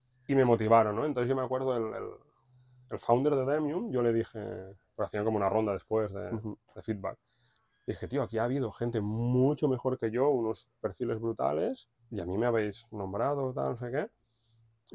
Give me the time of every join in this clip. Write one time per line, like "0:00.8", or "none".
0:12.0